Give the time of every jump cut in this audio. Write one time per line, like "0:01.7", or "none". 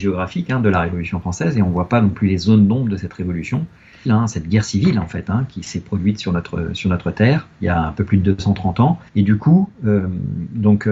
0:04.1
0:07.5
0:09.1

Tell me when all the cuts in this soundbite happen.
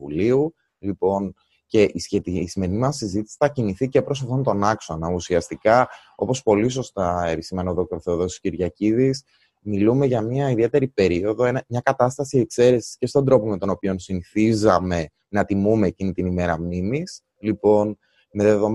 none

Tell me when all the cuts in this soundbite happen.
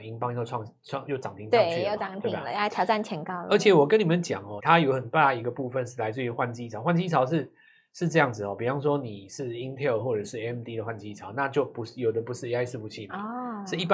0:01.1
0:04.6

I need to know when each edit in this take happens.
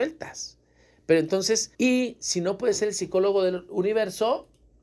0:01.7

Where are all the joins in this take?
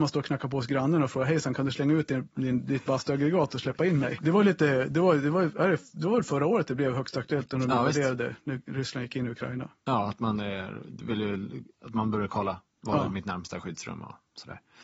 0:04.2

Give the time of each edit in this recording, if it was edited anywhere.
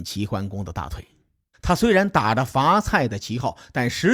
0:01.5

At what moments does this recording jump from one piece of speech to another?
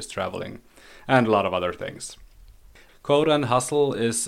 0:02.9

